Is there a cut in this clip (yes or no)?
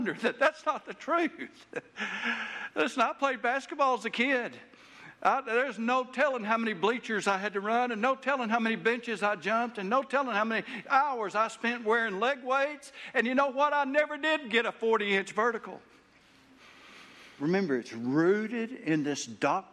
yes